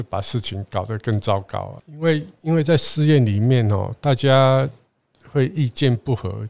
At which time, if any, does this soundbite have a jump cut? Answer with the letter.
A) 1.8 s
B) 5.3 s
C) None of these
A